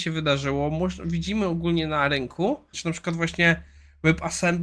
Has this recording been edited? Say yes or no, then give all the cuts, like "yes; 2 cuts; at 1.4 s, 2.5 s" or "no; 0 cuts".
yes; 1 cut; at 2.7 s